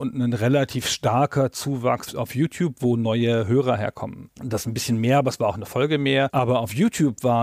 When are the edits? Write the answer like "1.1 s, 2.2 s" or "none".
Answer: 2.8 s, 4.3 s